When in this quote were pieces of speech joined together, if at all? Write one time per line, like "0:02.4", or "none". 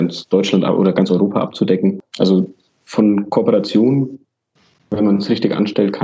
none